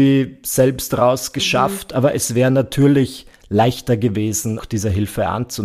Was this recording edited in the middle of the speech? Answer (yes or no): yes